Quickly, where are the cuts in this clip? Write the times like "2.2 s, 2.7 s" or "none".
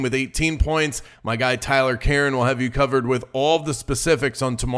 1.1 s